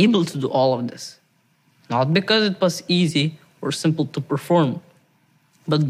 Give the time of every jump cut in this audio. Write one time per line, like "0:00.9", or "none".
none

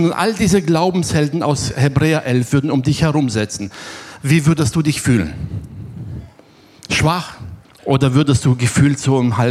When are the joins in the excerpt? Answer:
0:07.6

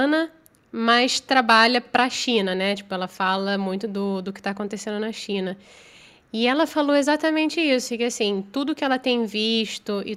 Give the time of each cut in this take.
none

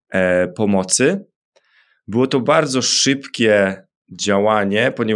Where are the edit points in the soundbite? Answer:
none

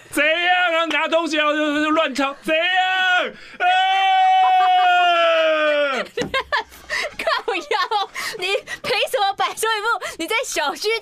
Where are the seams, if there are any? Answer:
none

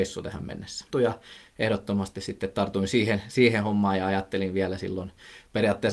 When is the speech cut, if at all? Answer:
0:00.9

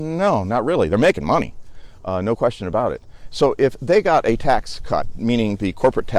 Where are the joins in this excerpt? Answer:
none

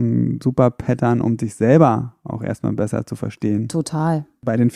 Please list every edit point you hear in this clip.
none

